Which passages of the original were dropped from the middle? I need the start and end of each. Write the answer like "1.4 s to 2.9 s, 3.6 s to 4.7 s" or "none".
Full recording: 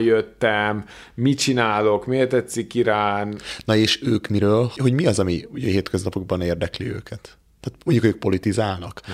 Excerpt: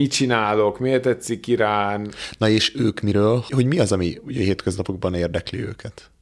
none

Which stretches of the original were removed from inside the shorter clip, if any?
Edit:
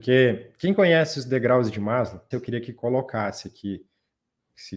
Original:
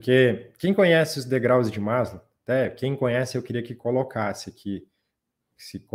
2.3 s to 3.3 s

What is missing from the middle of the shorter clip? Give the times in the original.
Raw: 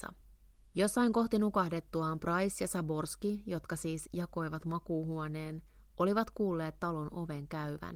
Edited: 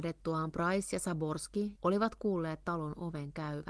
3.4 s to 5.9 s

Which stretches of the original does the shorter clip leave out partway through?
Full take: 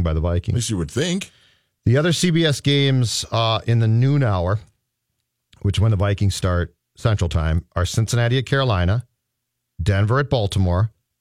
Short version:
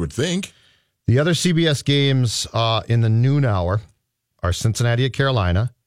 5.1 s to 7.7 s

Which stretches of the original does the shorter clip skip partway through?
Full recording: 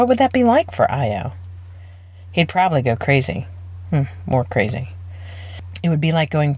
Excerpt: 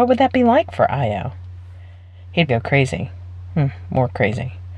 2.5 s to 2.8 s

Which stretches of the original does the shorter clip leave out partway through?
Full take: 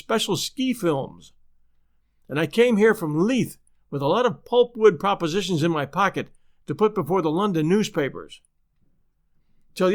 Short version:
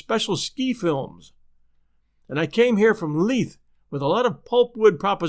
none

